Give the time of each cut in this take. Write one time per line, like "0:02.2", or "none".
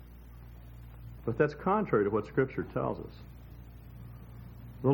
0:01.2